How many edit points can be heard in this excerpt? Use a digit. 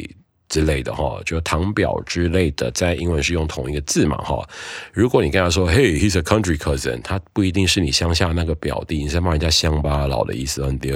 0